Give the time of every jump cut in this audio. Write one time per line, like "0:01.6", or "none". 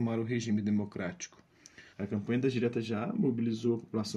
0:01.9